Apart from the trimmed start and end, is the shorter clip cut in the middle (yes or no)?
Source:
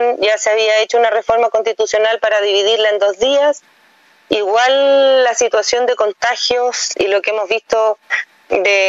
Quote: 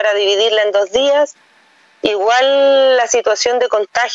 no